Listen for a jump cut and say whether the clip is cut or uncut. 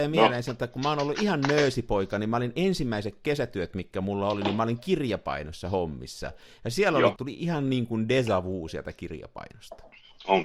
cut